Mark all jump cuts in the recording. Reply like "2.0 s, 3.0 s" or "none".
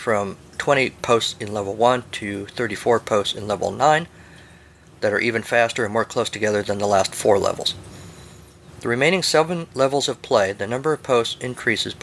9.7 s